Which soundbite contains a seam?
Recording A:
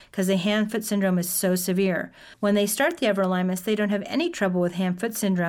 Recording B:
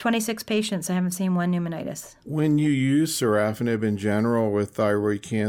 A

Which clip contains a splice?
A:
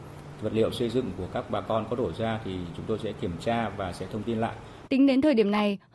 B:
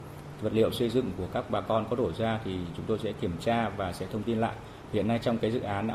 A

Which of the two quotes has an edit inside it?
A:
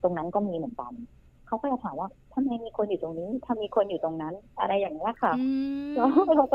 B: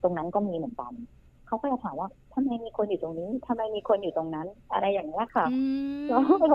A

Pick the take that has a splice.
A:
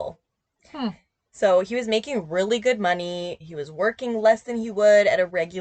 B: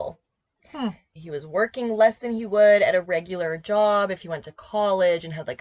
B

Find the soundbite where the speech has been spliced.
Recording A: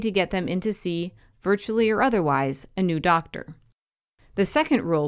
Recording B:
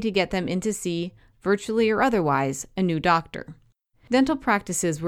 B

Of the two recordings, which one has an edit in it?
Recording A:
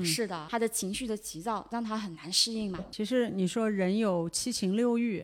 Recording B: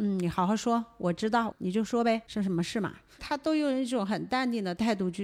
B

